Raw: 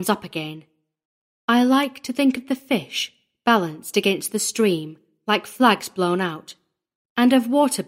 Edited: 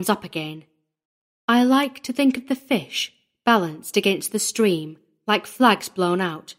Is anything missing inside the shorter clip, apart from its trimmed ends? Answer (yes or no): no